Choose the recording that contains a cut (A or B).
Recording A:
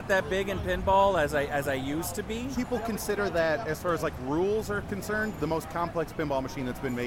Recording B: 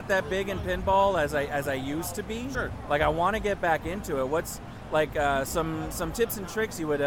A